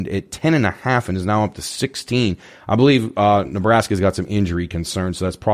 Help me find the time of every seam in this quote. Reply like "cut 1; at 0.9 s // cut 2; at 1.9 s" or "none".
none